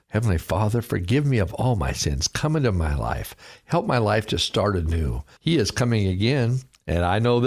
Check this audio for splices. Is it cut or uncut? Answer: cut